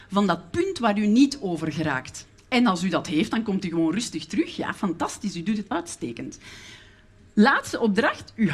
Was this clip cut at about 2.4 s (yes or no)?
yes